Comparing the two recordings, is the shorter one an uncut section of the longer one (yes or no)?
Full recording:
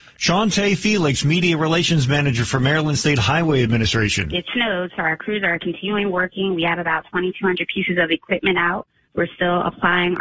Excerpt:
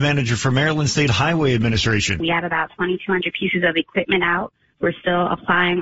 no